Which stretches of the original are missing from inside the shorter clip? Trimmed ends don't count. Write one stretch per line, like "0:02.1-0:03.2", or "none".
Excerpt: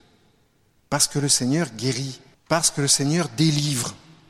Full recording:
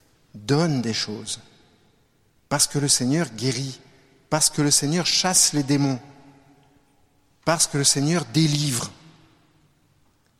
0:03.9-0:07.3